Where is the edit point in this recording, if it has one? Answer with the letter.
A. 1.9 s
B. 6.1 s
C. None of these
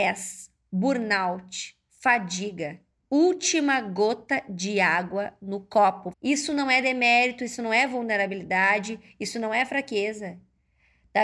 B